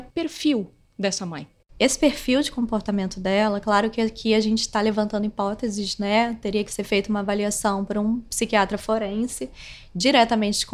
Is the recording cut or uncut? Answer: uncut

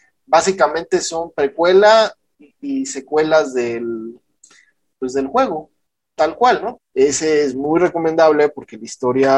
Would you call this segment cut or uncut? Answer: cut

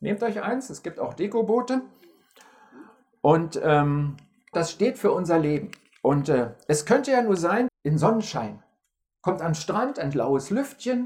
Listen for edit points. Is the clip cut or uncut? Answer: cut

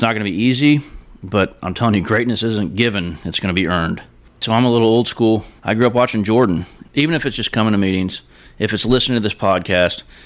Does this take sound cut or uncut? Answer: cut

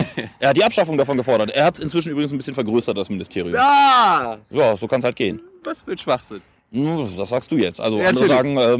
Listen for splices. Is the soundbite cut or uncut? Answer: uncut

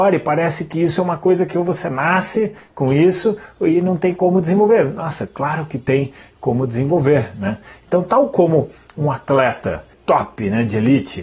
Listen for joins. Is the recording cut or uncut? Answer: cut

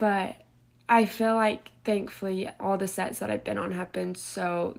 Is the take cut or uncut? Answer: uncut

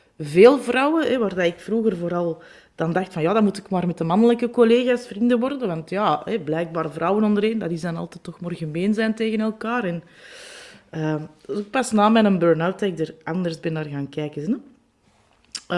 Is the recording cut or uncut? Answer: uncut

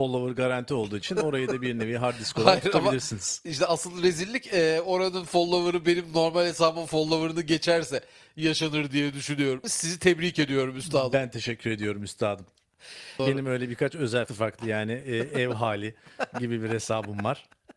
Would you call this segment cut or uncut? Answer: cut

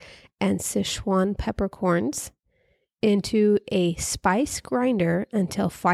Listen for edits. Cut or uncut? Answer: uncut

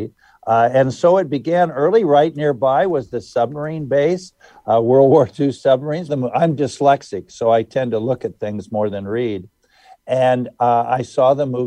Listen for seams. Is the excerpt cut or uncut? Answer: cut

